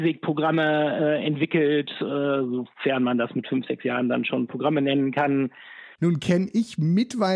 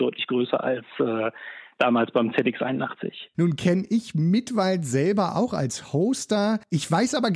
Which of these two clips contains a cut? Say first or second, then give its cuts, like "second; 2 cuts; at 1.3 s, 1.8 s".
first; 1 cut; at 5.9 s